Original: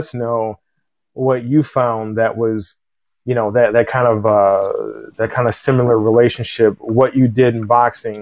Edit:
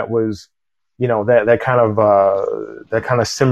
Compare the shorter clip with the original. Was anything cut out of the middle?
no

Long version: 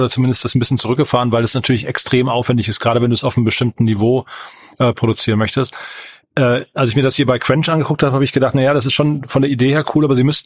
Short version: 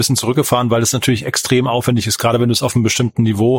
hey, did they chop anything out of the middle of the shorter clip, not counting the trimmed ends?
no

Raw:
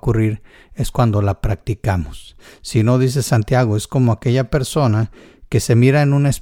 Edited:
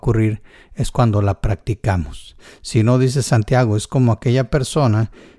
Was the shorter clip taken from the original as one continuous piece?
yes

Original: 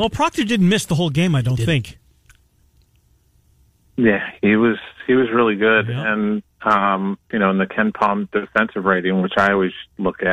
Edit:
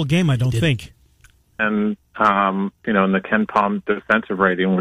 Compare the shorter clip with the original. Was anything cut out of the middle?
yes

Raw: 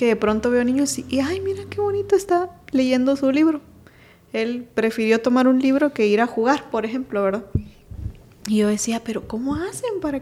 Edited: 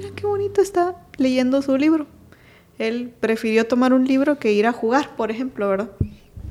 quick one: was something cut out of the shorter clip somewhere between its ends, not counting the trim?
no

